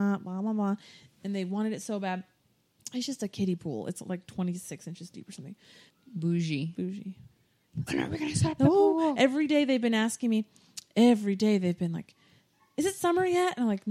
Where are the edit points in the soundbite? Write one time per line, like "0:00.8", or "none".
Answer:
0:05.9
0:07.9